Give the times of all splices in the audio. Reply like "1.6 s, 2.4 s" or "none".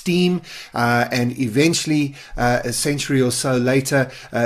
none